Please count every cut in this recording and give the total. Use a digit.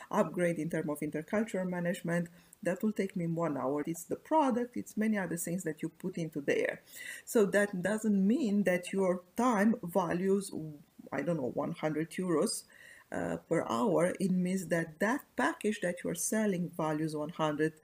1